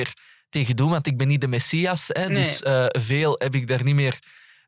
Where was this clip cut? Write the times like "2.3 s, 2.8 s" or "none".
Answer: none